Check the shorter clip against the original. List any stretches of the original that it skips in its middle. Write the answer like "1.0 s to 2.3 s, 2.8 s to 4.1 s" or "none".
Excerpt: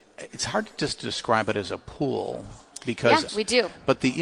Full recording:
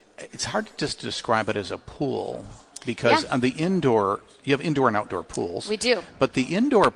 3.3 s to 5.6 s